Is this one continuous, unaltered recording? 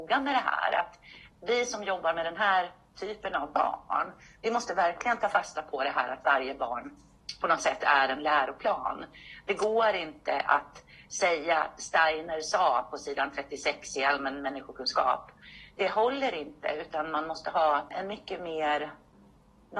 no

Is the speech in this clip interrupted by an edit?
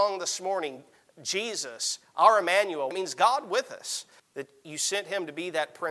yes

